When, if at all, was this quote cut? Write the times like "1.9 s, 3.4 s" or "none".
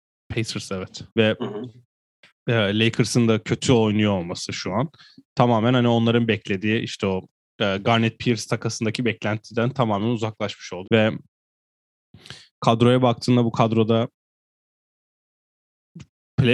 1.1 s, 10.8 s